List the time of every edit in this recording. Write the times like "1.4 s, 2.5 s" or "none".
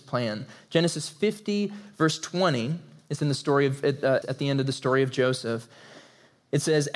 4.2 s